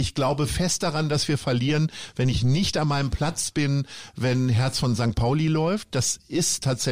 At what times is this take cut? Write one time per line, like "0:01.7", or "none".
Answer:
none